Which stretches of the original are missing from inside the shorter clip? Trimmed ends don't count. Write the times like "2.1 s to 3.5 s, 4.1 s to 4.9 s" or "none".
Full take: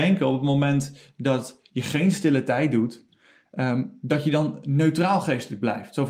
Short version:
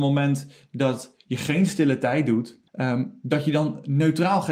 3.1 s to 3.5 s